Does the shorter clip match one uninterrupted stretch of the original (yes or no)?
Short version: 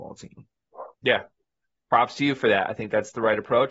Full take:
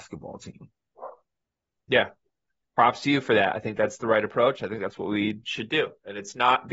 no